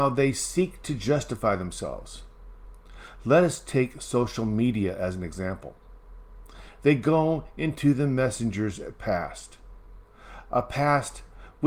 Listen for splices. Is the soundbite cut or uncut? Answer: uncut